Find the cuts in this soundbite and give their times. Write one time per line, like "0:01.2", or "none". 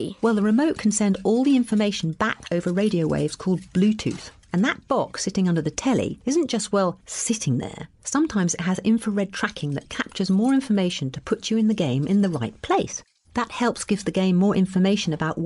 0:13.2